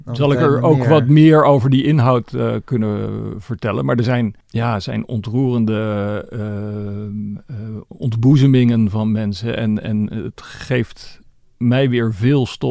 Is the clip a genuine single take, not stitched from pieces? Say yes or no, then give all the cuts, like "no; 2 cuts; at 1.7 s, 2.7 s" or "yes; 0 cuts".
no; 1 cut; at 4.4 s